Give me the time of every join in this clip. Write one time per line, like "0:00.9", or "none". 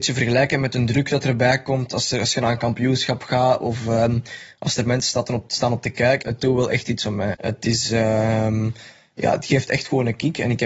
0:06.2
0:07.3